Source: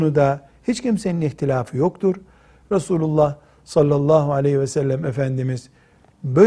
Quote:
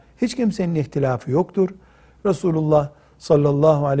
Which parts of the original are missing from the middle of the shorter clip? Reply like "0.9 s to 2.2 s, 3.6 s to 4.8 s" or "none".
none